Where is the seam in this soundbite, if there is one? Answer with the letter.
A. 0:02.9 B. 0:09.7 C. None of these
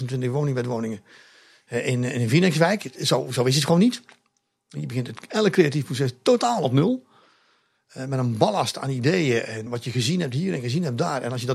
B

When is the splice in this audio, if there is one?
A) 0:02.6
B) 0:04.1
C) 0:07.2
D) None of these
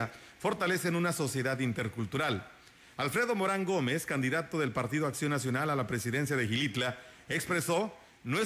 D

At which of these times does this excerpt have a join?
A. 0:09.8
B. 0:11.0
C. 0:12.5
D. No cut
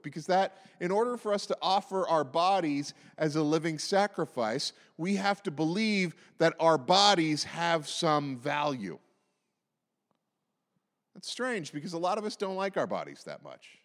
D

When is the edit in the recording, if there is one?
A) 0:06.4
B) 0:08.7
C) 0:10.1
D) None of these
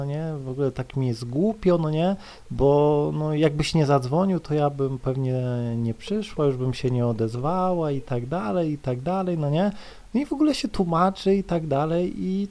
D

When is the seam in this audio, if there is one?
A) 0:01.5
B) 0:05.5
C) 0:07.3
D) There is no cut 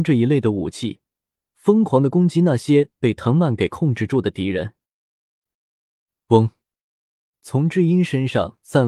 B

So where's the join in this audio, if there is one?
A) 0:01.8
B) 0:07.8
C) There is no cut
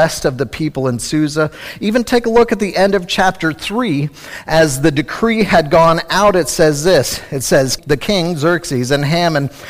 B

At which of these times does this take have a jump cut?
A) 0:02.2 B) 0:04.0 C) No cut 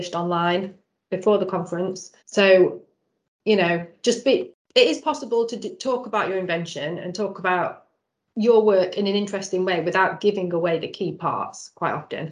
A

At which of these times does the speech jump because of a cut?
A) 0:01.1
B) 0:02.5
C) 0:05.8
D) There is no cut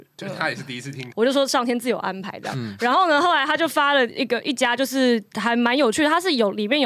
A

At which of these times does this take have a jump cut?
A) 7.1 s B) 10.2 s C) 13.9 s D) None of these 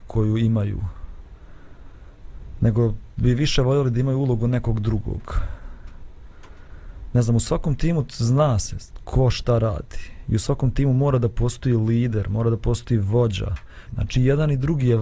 C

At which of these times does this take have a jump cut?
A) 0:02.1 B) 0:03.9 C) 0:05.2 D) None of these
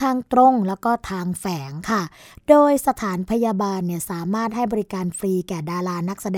D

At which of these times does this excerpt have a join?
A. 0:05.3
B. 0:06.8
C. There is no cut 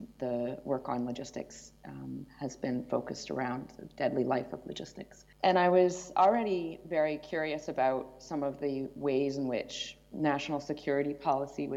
A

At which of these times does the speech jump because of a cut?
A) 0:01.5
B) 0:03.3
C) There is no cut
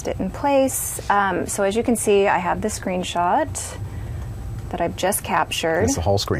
C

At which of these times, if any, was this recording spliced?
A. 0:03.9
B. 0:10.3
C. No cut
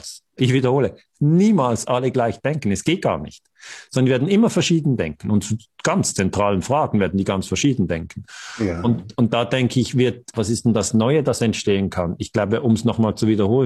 B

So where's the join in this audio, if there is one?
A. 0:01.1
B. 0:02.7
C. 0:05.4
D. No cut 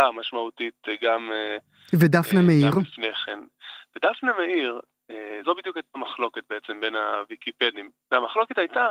C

